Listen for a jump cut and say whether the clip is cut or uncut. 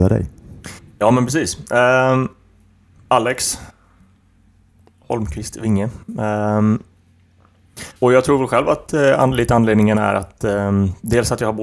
cut